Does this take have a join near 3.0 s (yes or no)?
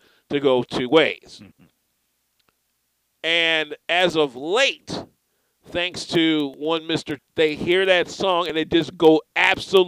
no